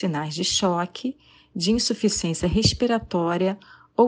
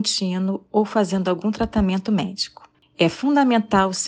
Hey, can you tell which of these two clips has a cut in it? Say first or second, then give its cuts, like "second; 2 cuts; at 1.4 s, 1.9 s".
second; 1 cut; at 2.8 s